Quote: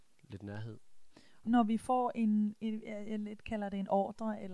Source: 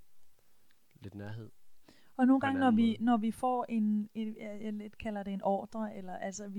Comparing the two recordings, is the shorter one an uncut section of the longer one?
no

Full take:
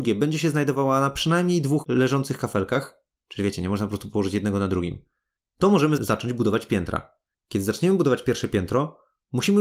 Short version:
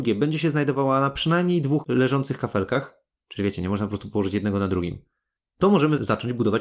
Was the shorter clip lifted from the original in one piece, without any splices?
yes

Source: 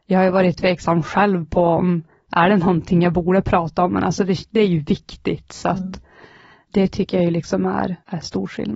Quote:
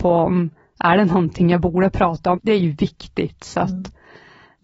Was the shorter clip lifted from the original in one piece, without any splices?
no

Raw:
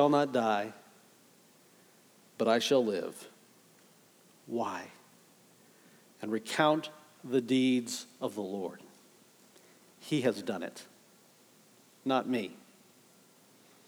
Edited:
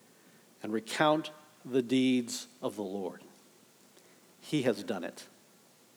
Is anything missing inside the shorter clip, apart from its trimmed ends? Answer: no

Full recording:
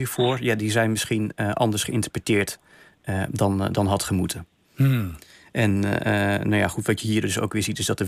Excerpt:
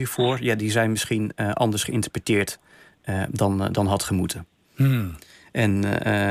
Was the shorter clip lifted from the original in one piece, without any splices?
yes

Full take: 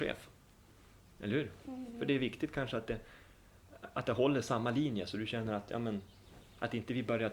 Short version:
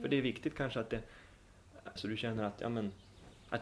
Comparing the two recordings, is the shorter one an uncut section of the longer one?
no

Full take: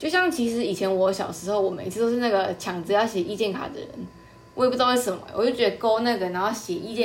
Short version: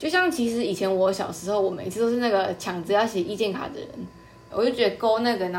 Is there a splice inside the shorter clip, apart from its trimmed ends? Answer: yes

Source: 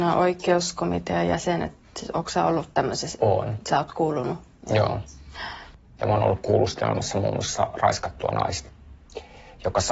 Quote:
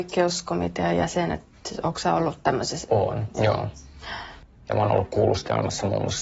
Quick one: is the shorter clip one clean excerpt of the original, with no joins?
no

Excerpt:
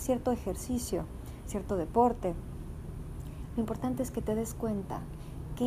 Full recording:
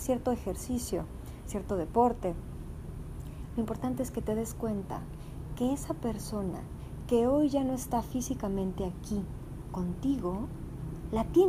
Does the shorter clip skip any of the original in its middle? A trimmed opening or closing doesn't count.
no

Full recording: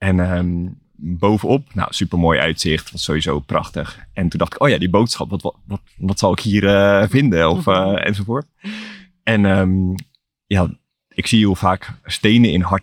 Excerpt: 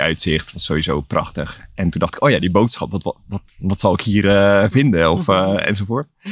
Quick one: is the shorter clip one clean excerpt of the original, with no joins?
yes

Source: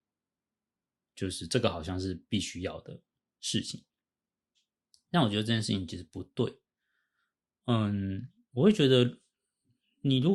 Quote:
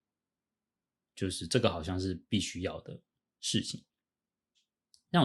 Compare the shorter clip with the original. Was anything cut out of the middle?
no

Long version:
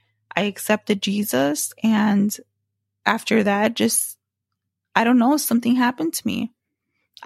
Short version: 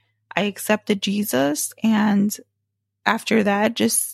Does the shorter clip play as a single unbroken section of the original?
yes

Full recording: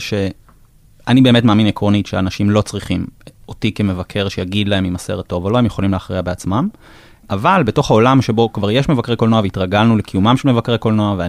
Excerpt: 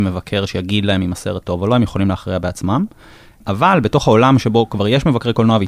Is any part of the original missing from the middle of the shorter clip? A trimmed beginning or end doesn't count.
no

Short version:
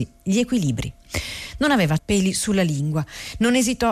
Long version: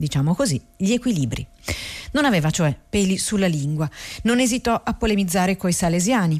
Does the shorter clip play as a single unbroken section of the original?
no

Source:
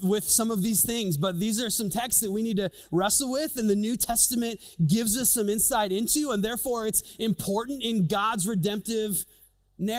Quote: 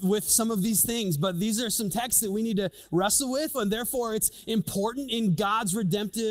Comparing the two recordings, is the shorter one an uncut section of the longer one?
no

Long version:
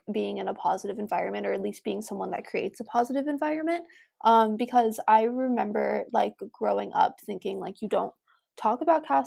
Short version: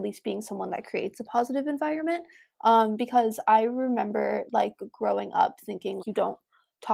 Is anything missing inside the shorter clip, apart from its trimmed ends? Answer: yes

